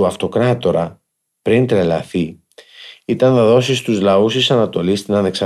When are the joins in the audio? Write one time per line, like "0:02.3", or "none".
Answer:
none

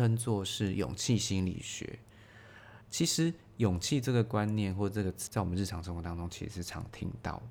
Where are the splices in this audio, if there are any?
0:02.8
0:05.3

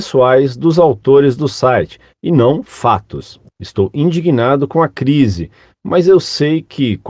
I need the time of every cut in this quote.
0:03.5

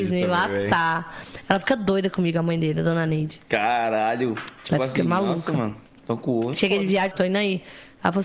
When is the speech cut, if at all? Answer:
0:07.1

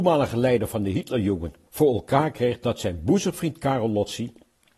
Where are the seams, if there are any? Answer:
0:01.7

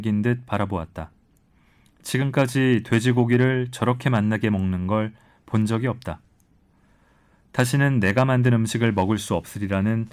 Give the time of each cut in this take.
none

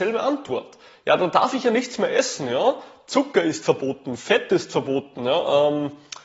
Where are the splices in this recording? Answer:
none

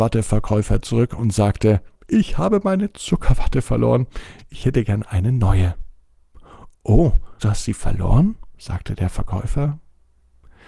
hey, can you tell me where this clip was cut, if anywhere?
0:07.4

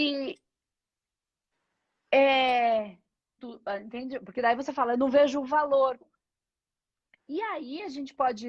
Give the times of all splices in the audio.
0:03.4
0:06.0

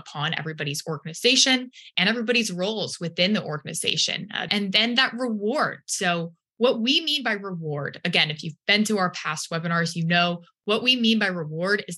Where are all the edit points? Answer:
0:04.5

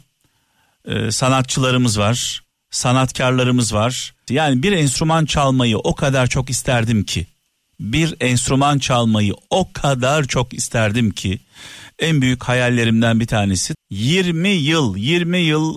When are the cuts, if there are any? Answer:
0:04.3
0:13.7

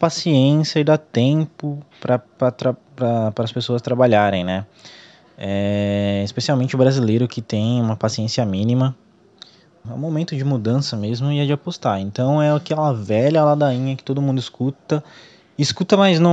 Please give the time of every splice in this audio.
0:09.8

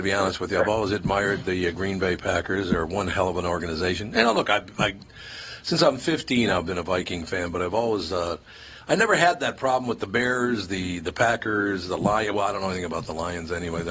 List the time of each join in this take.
none

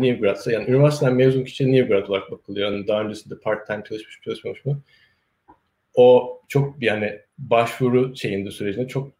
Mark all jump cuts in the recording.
none

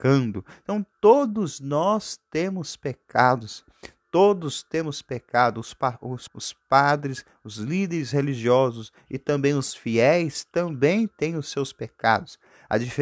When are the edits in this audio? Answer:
0:06.3

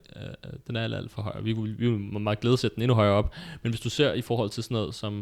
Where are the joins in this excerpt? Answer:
none

